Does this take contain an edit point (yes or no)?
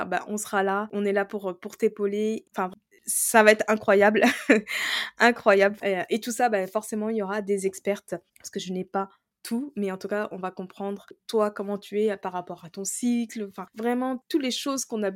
yes